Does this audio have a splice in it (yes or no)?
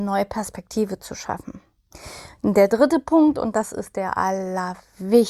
no